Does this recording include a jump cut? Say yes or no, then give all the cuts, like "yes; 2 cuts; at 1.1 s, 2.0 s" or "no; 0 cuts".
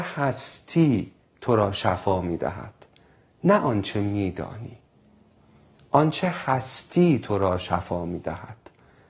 no; 0 cuts